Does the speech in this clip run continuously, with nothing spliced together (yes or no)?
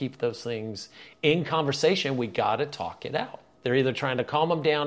no